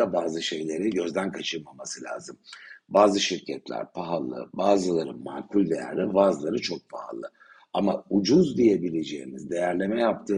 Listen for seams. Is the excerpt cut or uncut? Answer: cut